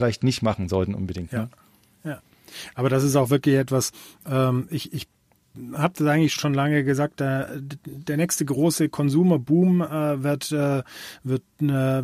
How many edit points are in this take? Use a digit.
1